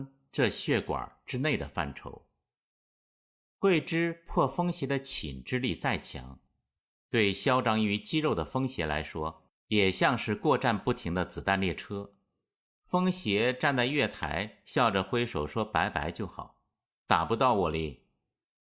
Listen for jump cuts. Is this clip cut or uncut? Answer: uncut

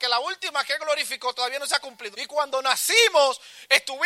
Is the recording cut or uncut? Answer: cut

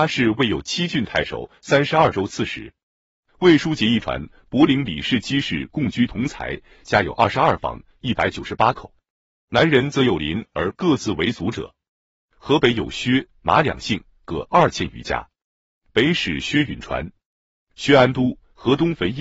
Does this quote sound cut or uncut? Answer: cut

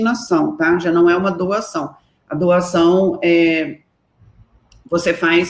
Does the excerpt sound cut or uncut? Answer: uncut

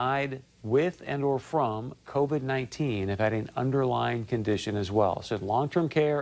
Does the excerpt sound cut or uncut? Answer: uncut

